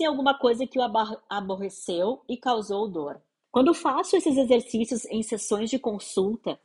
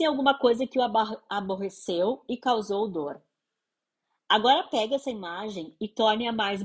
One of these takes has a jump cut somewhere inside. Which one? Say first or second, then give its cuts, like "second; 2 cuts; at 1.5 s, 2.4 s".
first; 1 cut; at 3.4 s